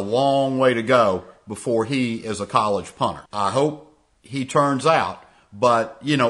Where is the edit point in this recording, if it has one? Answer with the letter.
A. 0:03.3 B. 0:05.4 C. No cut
A